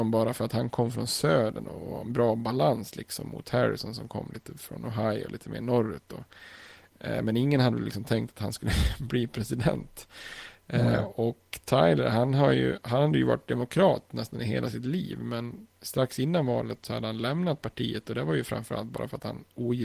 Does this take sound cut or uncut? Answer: uncut